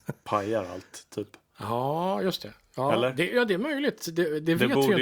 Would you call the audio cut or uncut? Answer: uncut